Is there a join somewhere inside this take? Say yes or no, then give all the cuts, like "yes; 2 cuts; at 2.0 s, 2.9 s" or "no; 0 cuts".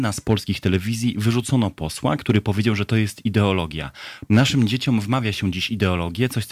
yes; 1 cut; at 4.3 s